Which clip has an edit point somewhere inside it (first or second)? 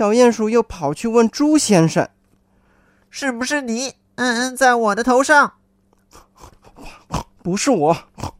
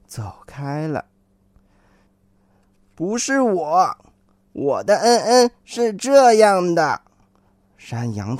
second